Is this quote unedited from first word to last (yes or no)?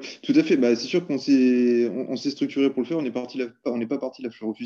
yes